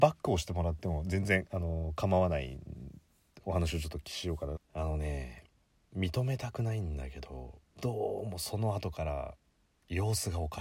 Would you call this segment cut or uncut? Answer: cut